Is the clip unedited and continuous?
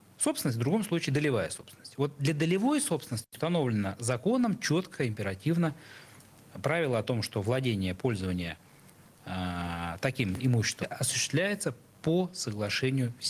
no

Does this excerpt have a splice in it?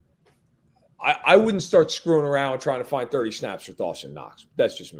no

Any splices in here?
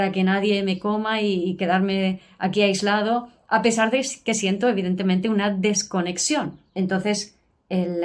yes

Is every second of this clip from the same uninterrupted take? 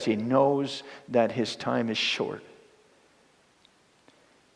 yes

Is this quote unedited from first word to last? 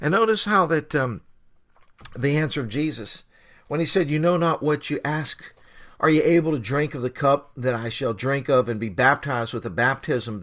yes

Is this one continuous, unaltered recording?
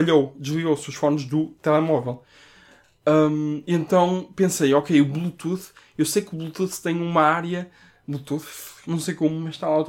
no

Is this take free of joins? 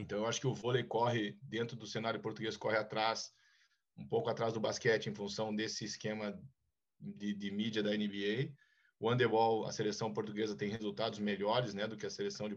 yes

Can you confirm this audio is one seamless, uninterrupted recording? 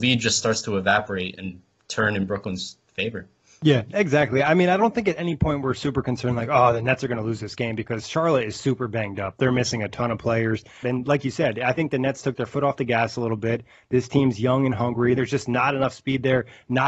no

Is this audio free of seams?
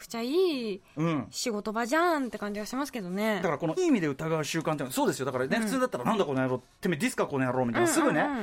no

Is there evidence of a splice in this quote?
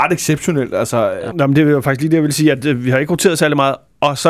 yes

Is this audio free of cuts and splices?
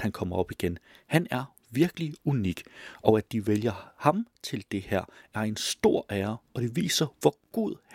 yes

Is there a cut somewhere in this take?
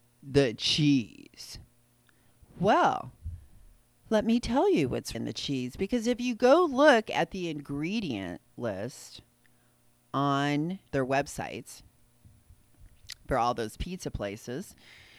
yes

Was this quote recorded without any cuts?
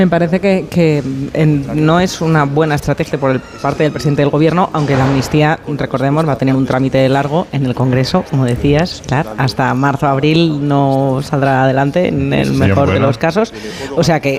no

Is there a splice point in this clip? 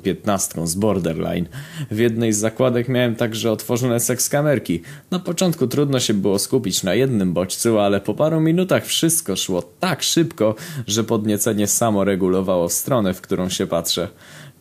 no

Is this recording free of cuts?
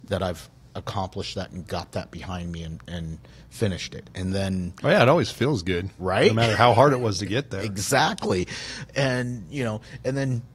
yes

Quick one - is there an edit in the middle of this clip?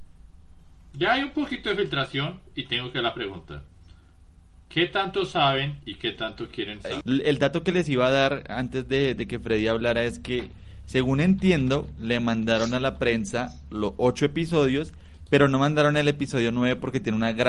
yes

